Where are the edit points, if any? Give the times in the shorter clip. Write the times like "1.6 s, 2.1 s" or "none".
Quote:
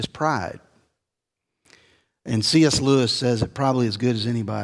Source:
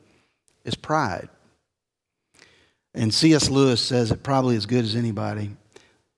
none